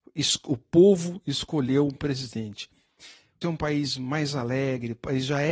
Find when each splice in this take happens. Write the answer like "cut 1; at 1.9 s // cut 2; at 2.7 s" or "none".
cut 1; at 3.4 s